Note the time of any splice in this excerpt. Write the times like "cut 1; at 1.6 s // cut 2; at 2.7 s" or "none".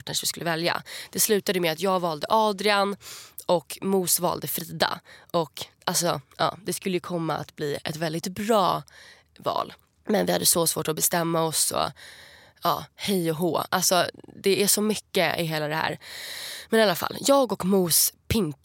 none